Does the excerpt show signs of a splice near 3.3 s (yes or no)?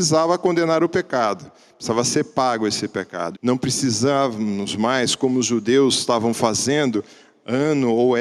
yes